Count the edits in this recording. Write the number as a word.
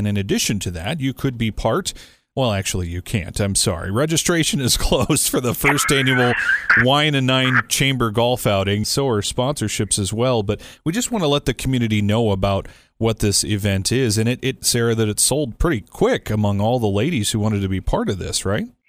two